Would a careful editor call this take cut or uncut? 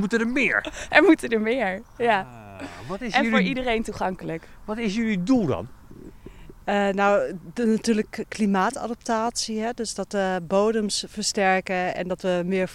uncut